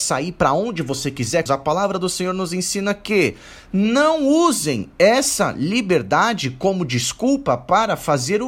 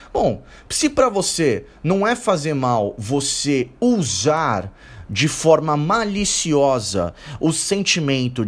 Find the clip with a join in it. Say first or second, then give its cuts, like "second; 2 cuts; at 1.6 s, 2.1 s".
first; 1 cut; at 1.5 s